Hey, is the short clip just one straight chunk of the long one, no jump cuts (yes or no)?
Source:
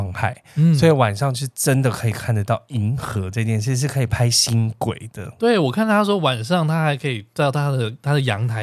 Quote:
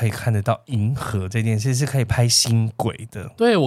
yes